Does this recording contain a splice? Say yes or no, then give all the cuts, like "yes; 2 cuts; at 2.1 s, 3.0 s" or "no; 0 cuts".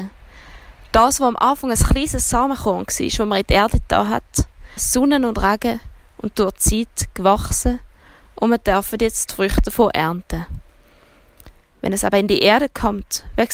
yes; 2 cuts; at 4.8 s, 11.6 s